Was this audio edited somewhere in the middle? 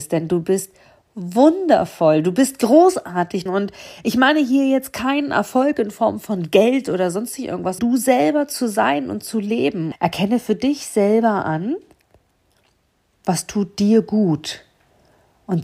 yes; 3 cuts; at 3.5 s, 7.8 s, 9.9 s

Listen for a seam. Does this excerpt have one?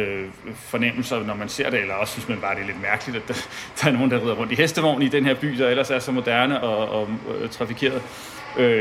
yes; 1 cut; at 6.6 s

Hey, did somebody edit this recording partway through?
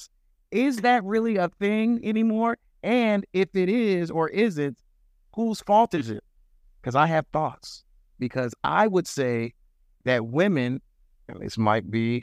no; 0 cuts

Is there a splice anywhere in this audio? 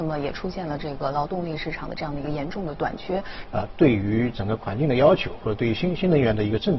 yes; 1 cut; at 3.5 s

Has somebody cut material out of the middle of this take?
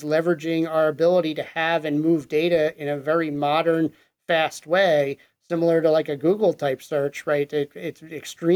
no; 0 cuts

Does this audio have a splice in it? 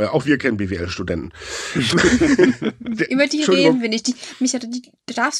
yes; 1 cut; at 1.9 s

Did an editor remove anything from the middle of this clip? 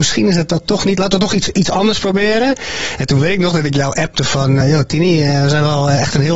yes; 1 cut; at 4.6 s

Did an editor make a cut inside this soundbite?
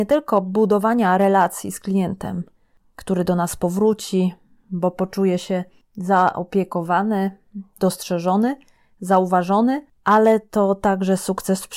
no; 0 cuts

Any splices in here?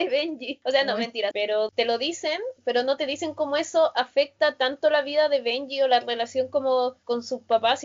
yes; 1 cut; at 1.3 s

